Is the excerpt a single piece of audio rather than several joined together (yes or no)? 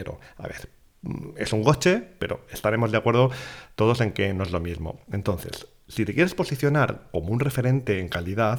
yes